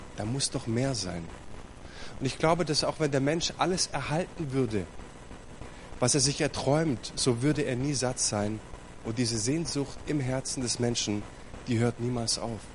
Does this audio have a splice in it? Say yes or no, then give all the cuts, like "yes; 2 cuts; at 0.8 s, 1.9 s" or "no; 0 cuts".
no; 0 cuts